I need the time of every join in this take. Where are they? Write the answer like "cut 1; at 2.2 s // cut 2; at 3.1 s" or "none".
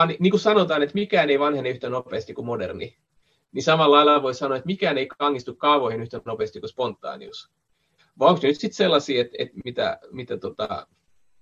cut 1; at 8.0 s